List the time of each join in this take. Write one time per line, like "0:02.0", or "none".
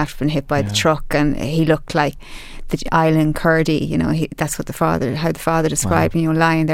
0:02.2